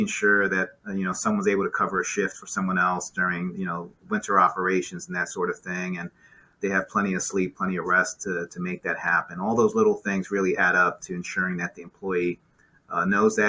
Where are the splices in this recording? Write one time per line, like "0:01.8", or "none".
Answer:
none

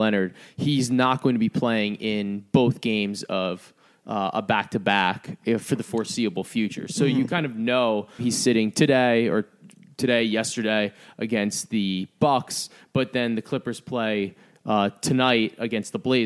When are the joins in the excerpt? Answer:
0:08.2

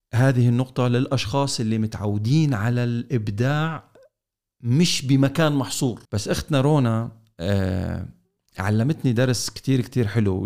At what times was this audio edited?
0:06.0

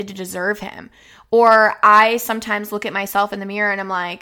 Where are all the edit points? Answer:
none

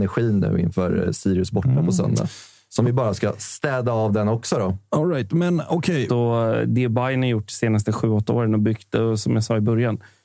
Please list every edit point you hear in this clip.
0:06.1

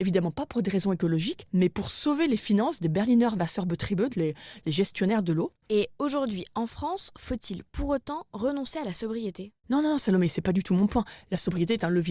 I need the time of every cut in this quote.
0:04.1
0:05.6

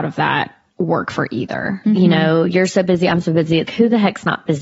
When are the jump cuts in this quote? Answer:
0:01.8
0:03.7

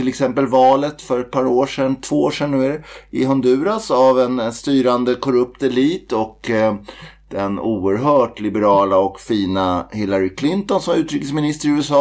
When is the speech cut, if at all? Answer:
none

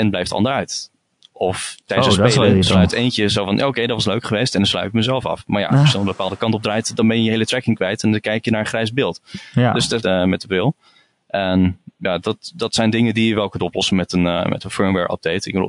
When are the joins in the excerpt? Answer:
0:10.0

